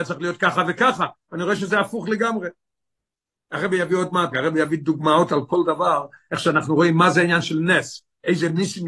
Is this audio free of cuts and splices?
no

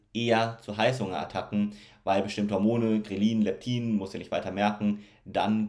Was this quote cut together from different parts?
no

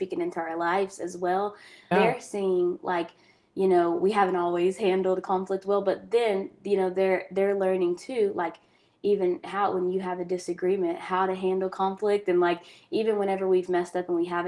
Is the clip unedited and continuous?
no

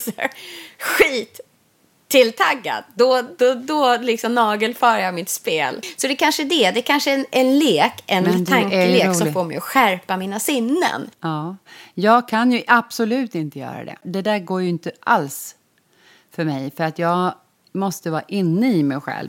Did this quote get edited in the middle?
no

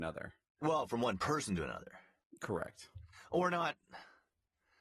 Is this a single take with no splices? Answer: yes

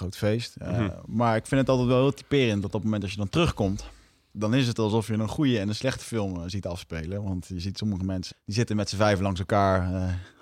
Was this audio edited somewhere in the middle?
yes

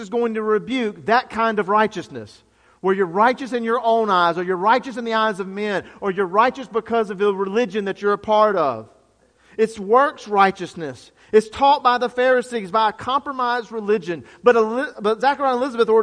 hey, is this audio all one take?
yes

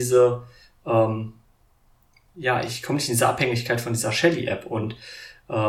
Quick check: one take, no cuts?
yes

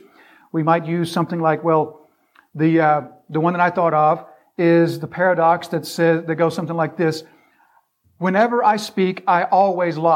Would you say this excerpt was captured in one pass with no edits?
yes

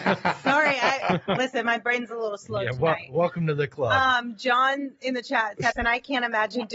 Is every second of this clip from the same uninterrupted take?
no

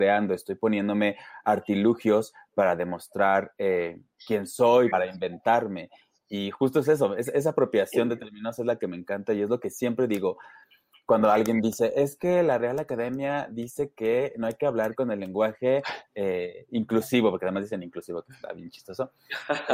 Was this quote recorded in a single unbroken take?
no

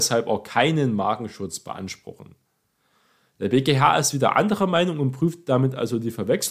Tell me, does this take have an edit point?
no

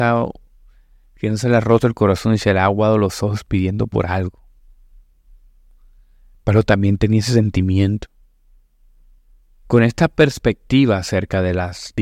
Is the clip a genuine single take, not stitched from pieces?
no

